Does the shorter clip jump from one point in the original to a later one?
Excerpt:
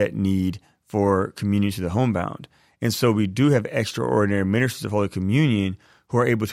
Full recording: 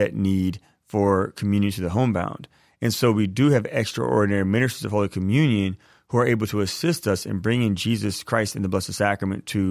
no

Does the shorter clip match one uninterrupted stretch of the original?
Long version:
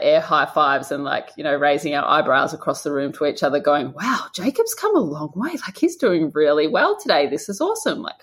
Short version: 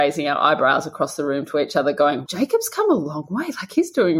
no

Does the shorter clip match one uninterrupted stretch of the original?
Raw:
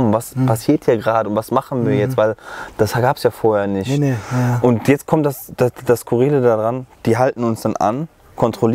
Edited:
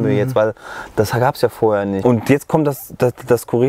no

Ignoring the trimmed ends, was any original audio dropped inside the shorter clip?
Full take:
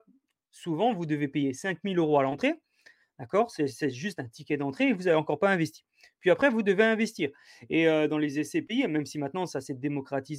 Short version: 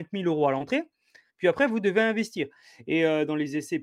yes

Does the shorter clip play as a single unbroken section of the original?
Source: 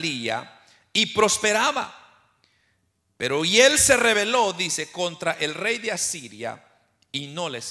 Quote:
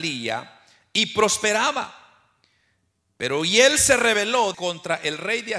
no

